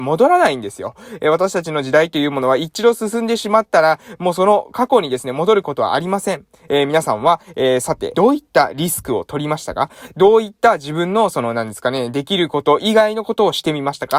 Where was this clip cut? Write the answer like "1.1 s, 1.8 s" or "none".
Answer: 6.7 s, 8.1 s